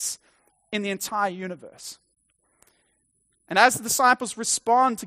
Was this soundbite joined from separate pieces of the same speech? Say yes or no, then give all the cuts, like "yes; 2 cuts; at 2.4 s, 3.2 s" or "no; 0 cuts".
no; 0 cuts